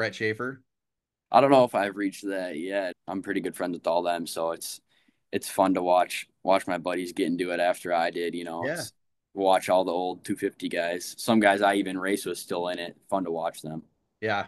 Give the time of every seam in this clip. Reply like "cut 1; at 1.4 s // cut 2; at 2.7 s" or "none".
cut 1; at 2.9 s